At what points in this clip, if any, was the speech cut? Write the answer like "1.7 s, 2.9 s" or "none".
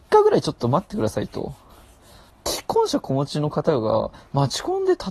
2.3 s